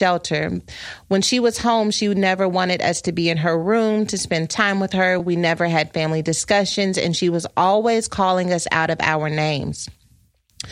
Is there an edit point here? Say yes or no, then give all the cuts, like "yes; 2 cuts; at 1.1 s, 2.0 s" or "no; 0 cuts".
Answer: no; 0 cuts